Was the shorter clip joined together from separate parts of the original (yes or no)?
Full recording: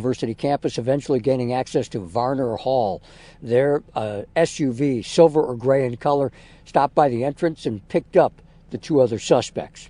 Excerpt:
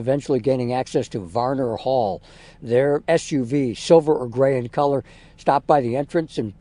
yes